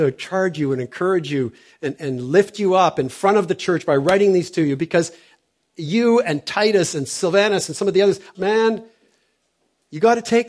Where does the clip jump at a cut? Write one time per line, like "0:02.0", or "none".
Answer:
0:02.0
0:08.3